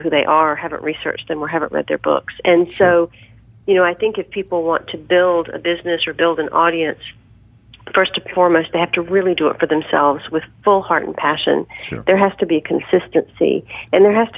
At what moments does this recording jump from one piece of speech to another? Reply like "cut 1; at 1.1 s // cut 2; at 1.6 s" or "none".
none